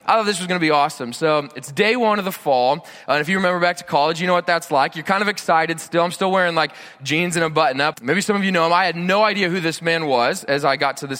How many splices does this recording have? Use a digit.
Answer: 1